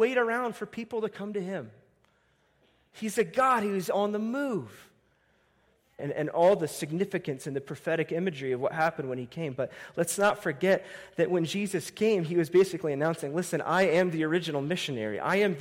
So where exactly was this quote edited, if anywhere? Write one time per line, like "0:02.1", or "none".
0:06.0

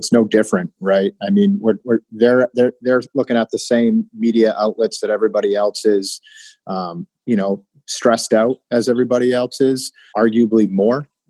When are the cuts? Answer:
0:07.1
0:10.1

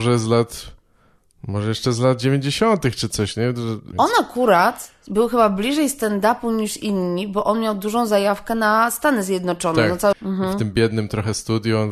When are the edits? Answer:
0:03.9
0:10.1

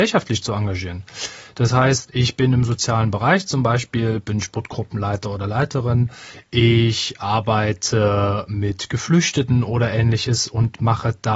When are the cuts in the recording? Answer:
none

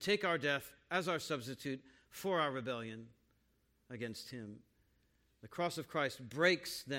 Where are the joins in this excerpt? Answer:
none

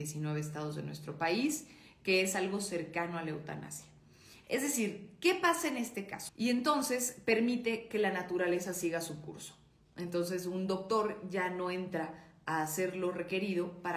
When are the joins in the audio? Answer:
0:04.4
0:06.3

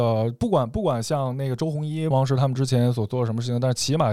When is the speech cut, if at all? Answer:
0:02.1

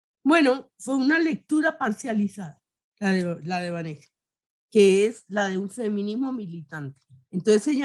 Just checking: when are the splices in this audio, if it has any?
0:04.5

